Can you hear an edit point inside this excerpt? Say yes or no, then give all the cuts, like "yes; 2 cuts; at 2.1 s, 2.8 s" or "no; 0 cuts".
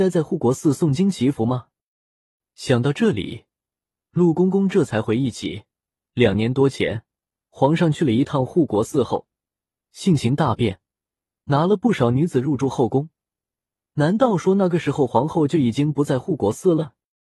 no; 0 cuts